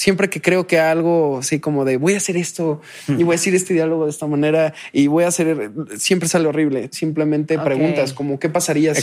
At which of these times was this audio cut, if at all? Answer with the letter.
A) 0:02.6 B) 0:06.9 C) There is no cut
B